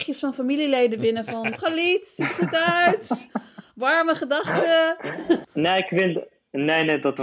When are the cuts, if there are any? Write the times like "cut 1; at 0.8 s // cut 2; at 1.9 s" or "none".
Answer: cut 1; at 1.5 s // cut 2; at 5.4 s